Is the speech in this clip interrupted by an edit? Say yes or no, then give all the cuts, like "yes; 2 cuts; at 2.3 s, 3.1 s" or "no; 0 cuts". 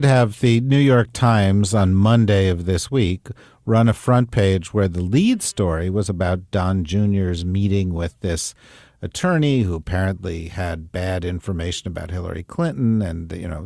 no; 0 cuts